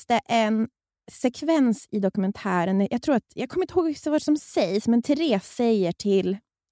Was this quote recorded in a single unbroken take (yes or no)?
yes